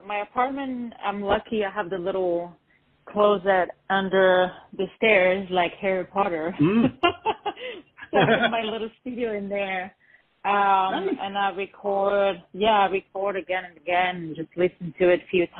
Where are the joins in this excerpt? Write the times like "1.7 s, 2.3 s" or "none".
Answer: none